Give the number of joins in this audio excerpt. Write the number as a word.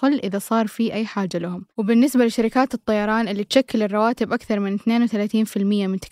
one